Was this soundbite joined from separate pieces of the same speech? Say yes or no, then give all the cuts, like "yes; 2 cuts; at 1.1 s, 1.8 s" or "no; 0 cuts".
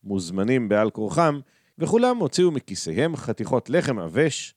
yes; 1 cut; at 1.7 s